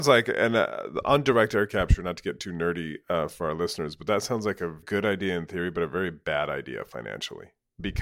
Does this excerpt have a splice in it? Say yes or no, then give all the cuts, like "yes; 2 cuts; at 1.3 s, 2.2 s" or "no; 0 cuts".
no; 0 cuts